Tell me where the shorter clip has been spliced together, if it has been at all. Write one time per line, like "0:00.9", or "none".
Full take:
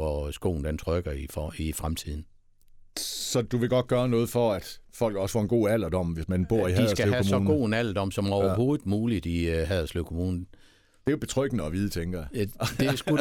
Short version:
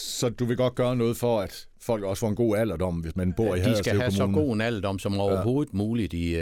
none